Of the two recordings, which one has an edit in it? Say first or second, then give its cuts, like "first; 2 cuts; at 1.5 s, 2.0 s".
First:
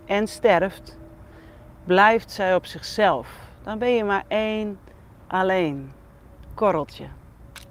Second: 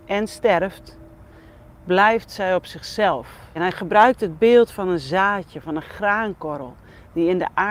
second; 1 cut; at 3.6 s